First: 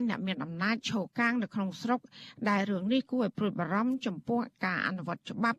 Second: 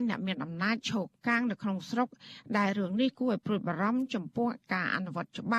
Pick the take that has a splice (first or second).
first